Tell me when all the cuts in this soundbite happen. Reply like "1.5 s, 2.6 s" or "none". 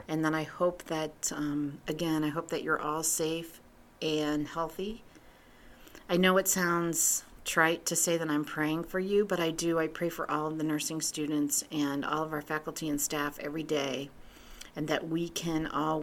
none